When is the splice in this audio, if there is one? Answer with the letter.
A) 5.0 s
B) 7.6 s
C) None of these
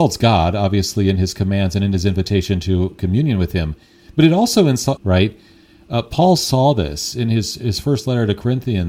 A